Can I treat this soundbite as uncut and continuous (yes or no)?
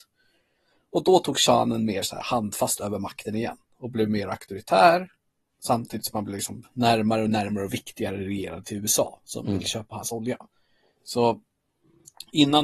yes